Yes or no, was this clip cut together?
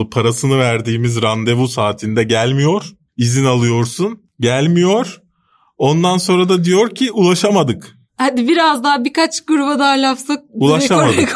no